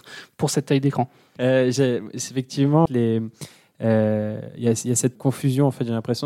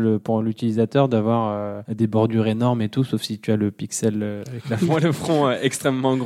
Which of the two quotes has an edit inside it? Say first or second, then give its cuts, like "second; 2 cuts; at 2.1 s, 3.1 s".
first; 3 cuts; at 1.4 s, 2.9 s, 5.2 s